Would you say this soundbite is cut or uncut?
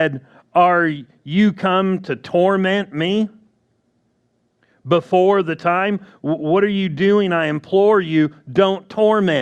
uncut